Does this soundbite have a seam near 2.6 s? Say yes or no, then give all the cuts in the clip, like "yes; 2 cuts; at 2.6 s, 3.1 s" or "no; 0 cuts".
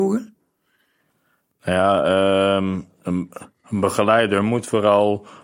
no; 0 cuts